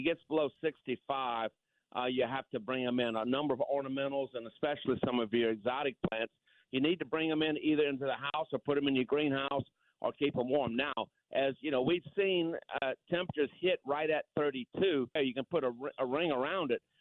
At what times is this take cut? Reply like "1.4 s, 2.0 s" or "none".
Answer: 15.2 s